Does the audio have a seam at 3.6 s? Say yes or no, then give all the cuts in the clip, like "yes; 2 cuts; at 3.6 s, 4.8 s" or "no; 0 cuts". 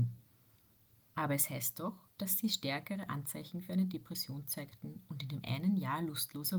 no; 2 cuts; at 1.0 s, 2.1 s